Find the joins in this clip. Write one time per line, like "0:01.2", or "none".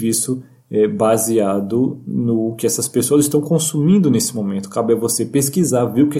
none